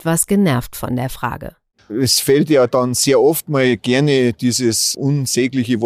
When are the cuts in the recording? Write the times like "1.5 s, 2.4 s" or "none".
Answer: 1.8 s